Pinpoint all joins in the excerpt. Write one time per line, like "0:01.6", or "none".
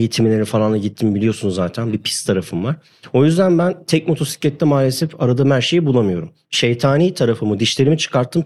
none